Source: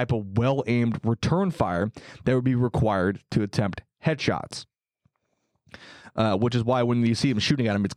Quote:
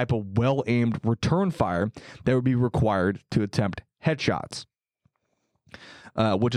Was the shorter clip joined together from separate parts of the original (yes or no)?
no